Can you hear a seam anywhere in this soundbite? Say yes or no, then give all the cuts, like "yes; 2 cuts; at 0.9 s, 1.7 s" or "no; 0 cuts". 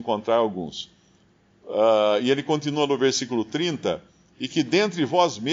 no; 0 cuts